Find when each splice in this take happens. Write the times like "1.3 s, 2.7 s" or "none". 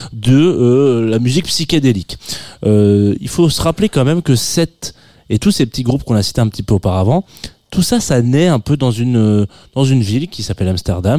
none